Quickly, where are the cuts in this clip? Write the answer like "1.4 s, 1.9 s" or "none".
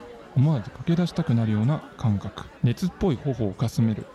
2.6 s